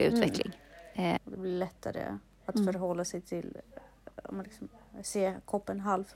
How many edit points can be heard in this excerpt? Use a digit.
1